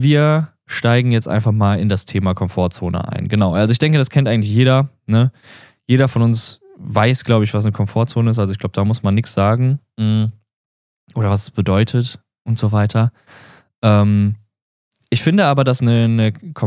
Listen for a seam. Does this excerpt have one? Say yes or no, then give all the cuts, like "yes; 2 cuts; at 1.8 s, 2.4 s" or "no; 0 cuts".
no; 0 cuts